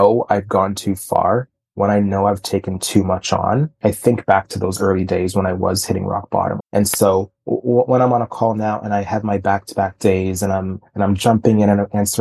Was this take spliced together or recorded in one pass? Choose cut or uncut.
cut